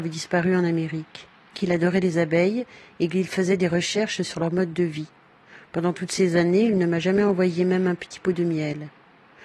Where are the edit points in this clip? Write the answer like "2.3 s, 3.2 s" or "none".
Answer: 1.5 s